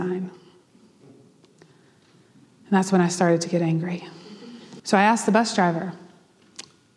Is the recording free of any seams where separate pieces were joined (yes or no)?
no